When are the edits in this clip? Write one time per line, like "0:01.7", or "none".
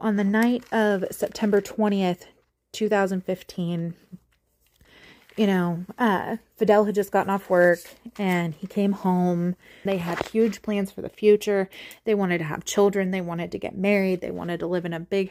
0:09.9